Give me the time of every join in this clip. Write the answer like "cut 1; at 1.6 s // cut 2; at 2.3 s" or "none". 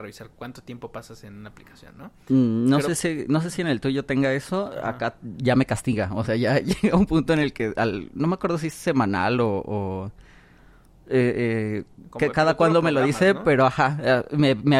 none